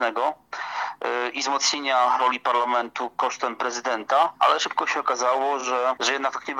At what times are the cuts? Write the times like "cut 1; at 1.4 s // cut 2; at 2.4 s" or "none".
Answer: none